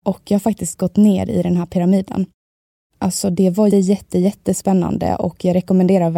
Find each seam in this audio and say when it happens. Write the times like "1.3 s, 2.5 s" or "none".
3.7 s